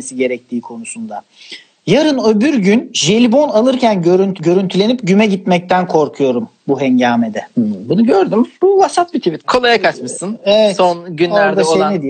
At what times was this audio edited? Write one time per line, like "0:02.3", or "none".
0:09.4